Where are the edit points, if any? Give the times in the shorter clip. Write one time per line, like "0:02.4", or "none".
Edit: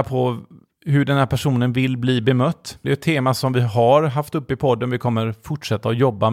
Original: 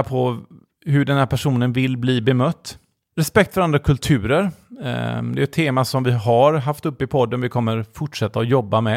0:02.8